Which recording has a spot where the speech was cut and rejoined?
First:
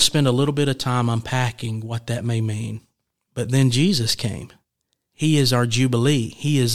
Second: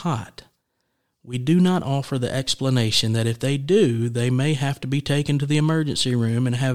first; 2 cuts; at 3.3 s, 5.1 s

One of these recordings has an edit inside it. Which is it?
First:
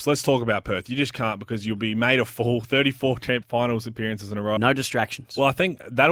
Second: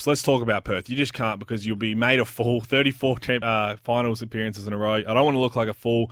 first; 2 cuts; at 3.4 s, 4.6 s

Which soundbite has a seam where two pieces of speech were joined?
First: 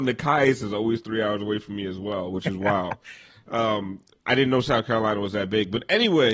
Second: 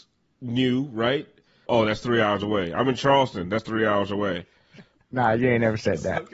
second; 1 cut; at 1.7 s

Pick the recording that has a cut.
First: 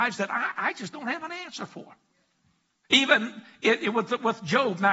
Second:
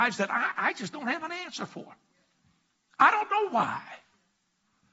first; 1 cut; at 2.8 s

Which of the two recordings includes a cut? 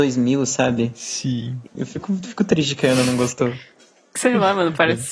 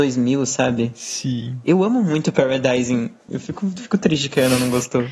first; 1 cut; at 1.7 s

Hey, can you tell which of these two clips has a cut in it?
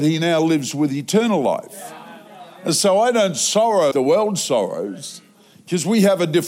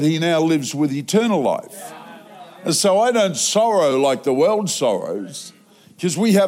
first; 1 cut; at 3.9 s

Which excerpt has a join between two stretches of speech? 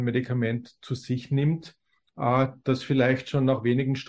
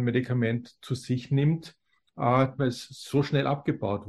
second; 1 cut; at 2.6 s

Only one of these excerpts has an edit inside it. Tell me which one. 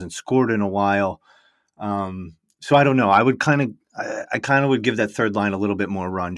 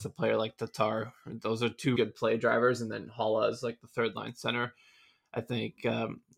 second; 1 cut; at 2.0 s

